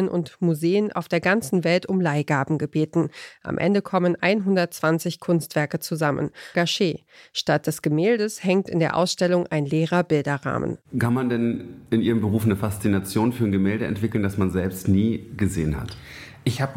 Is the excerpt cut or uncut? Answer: cut